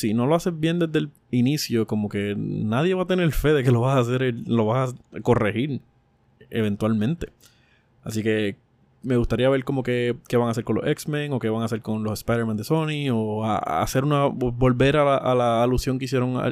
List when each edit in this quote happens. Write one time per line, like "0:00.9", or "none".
none